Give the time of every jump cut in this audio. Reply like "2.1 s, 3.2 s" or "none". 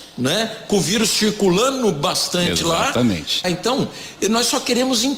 3.4 s